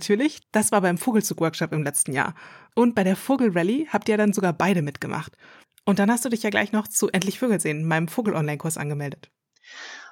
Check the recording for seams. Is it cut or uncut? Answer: uncut